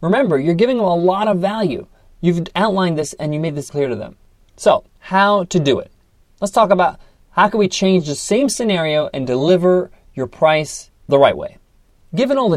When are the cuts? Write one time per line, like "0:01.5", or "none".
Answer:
0:03.7
0:04.9